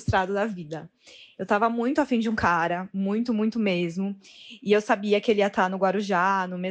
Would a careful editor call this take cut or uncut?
uncut